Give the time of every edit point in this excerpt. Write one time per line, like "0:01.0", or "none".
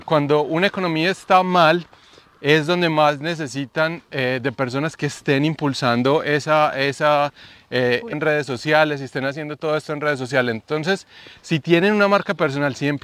0:08.1